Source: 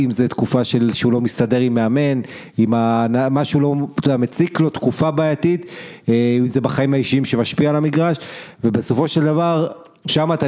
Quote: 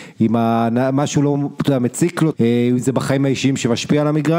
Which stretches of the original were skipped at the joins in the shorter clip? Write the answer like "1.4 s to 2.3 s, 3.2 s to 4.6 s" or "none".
4.7 s to 6.0 s